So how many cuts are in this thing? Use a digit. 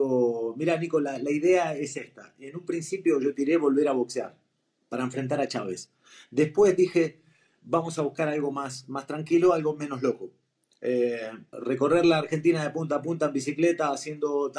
1